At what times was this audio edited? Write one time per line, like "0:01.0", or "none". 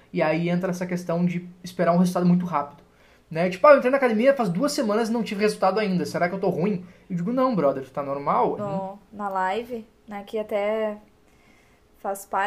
0:08.6

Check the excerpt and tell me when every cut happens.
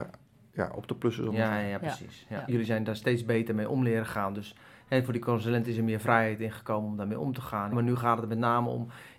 0:02.5
0:07.7

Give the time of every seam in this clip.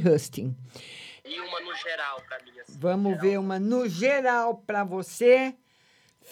0:01.2

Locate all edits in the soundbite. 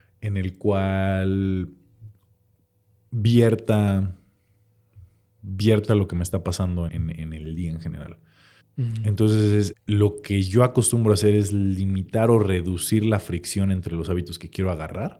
0:06.9
0:08.6
0:09.7

